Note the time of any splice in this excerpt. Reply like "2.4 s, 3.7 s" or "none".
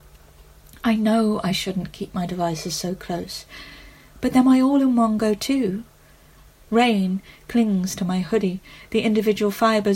6.6 s